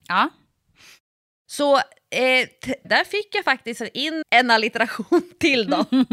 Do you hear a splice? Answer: yes; 2 cuts; at 2.8 s, 4.2 s

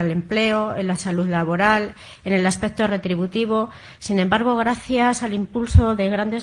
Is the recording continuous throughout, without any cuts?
no; 1 cut; at 4.0 s

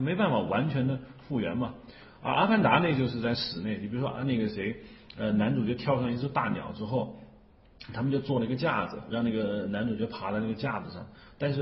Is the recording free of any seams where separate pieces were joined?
yes; 0 cuts

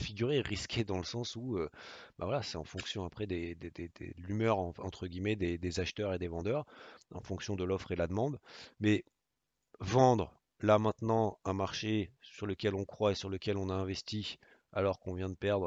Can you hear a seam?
no; 0 cuts

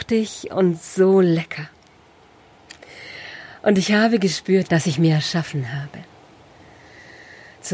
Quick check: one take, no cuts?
no; 1 cut; at 4.6 s

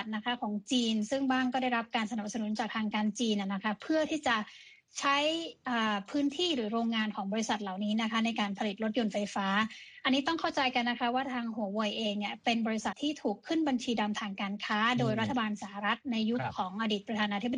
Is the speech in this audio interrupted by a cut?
yes; 1 cut; at 12.9 s

